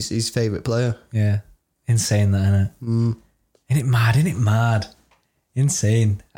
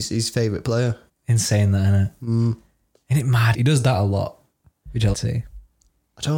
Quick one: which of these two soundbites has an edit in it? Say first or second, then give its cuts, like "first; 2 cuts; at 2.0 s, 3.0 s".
second; 3 cuts; at 1.1 s, 3.5 s, 5.1 s